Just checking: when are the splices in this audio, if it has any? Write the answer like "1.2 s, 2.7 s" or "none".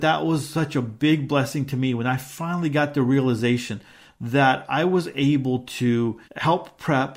6.2 s